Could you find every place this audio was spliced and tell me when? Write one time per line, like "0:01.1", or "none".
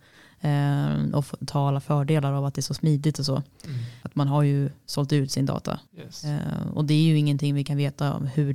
0:04.0
0:05.9